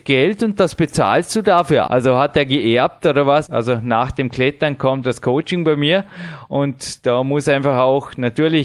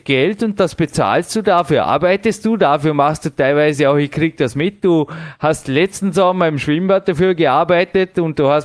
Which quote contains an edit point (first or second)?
first